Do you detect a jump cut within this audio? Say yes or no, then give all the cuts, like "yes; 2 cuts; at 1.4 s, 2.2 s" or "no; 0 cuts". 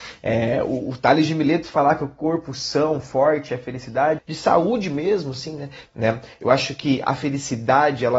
yes; 2 cuts; at 4.2 s, 5.9 s